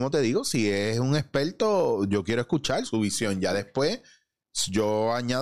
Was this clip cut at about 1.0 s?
no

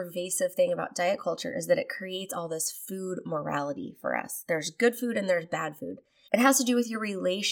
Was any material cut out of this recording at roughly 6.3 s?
yes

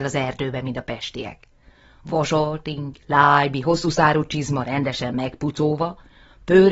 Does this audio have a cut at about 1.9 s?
no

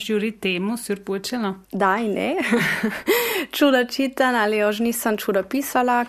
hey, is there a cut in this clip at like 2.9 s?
no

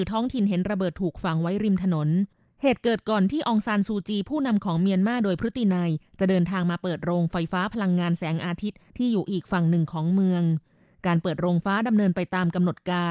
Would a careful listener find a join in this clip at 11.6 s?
yes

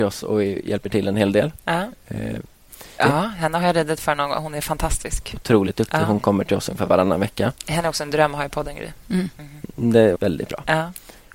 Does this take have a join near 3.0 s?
yes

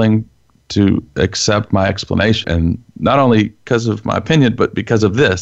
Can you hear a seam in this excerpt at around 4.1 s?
no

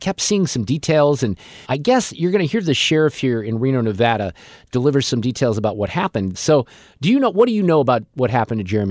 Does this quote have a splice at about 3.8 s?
no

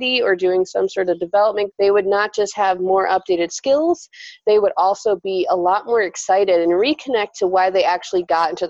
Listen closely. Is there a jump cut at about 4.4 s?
no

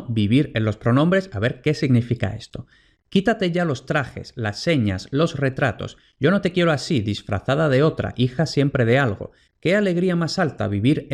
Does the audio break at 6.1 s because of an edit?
no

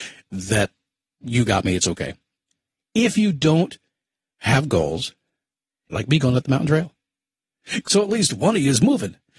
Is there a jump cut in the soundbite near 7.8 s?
yes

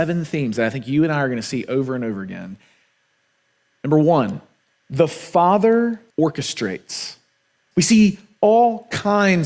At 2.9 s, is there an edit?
no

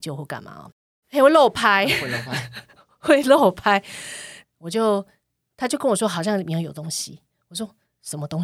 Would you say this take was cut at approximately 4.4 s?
yes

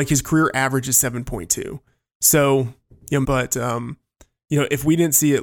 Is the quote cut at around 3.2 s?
yes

